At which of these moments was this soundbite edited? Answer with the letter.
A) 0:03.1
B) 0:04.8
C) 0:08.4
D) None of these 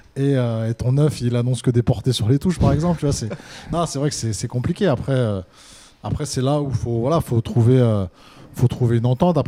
D